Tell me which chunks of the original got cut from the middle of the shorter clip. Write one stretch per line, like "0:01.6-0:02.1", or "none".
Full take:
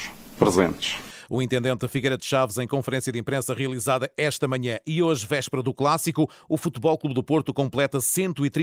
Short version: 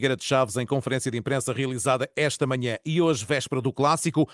none